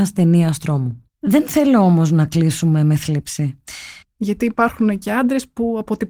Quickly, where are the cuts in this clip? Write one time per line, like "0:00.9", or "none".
0:01.1
0:04.0